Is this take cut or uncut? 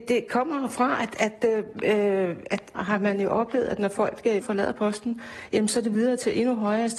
cut